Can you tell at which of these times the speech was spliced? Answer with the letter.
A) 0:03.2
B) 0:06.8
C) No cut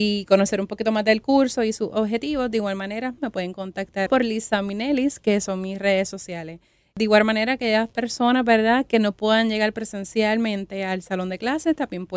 A